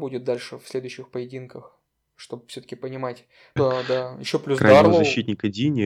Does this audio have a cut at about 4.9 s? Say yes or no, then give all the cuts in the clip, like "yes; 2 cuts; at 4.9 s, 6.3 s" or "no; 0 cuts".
no; 1 cut; at 3.6 s